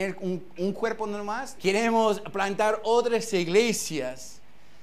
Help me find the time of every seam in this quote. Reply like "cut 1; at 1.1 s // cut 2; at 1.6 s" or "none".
cut 1; at 1.6 s